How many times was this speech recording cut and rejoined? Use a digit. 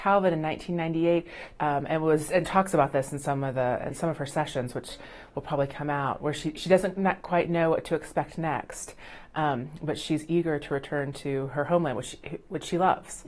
1